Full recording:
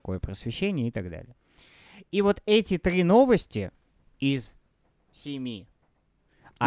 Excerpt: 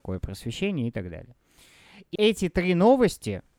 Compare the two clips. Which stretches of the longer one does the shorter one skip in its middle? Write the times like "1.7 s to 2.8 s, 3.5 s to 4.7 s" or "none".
2.2 s to 2.4 s